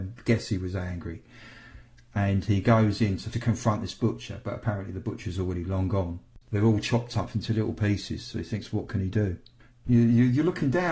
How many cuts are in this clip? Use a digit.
2